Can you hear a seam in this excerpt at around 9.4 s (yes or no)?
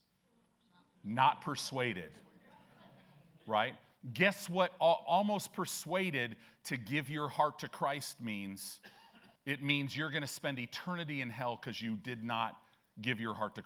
yes